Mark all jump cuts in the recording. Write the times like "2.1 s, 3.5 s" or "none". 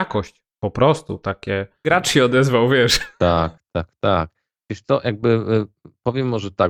1.8 s